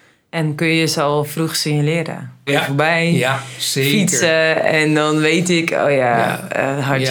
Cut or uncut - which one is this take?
cut